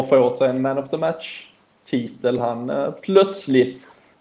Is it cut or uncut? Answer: uncut